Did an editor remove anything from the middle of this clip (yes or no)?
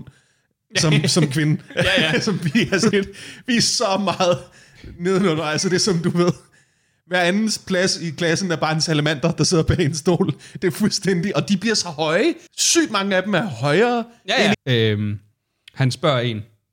yes